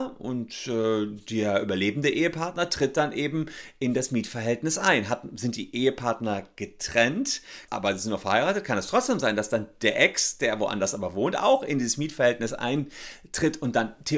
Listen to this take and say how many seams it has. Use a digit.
1